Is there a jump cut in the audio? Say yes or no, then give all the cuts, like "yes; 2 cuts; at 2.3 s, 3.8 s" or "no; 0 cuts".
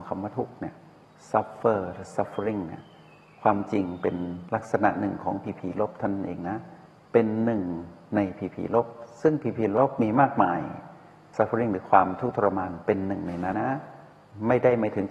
yes; 1 cut; at 13.5 s